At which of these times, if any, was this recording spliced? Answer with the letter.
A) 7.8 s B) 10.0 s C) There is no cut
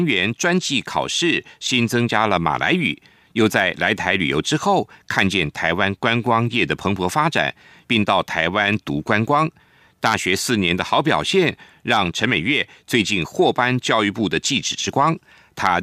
A